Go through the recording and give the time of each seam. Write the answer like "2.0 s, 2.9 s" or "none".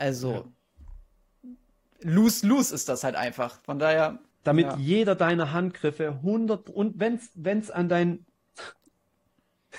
4.3 s

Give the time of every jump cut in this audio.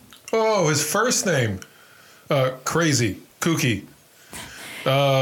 3.3 s

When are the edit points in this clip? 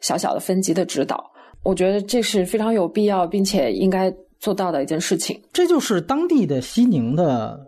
none

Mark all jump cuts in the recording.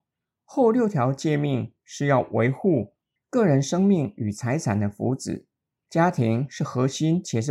3.2 s

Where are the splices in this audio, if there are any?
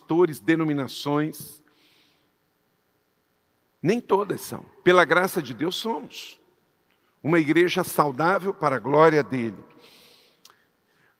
none

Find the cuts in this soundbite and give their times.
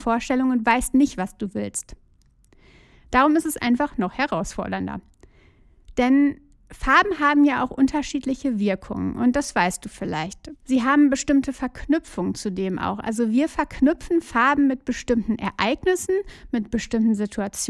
10.6 s

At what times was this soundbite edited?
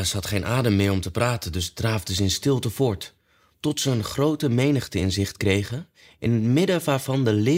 none

